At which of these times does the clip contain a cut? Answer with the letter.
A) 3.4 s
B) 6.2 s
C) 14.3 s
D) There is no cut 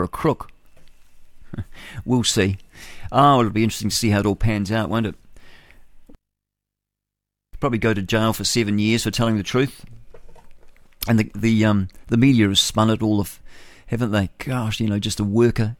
D